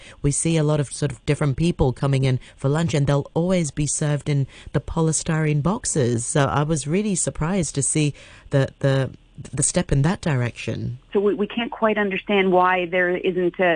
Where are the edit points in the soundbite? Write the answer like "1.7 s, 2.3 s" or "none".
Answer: 11.1 s